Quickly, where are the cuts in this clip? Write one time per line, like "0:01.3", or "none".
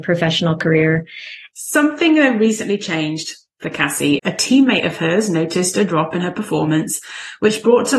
0:01.5
0:04.2